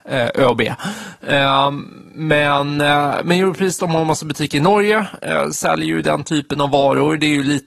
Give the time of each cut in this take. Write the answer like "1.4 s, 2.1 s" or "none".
none